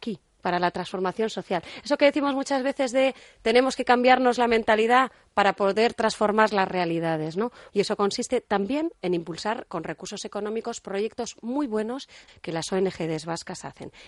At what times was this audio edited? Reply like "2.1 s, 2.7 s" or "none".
7.7 s, 12.3 s